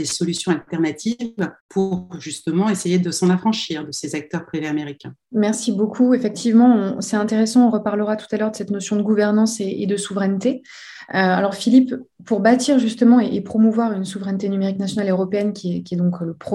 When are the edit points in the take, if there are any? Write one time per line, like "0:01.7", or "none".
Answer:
none